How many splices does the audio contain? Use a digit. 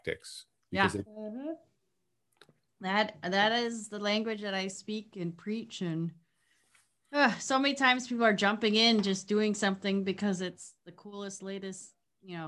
1